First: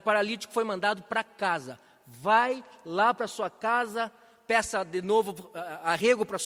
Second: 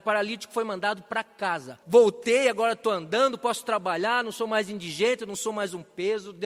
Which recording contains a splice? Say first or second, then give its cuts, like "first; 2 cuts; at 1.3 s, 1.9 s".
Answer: second; 1 cut; at 1.8 s